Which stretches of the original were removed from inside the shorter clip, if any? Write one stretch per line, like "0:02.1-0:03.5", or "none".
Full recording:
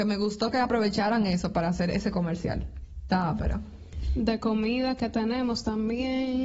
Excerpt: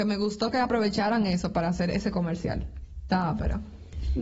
none